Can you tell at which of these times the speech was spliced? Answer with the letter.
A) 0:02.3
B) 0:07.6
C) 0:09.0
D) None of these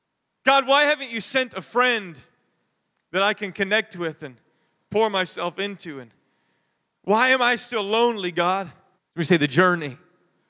C